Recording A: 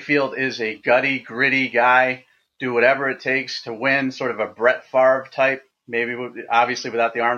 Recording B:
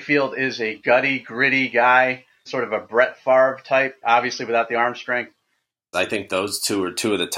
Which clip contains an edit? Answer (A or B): B